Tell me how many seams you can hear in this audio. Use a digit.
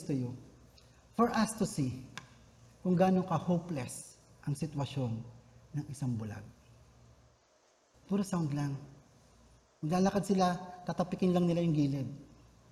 1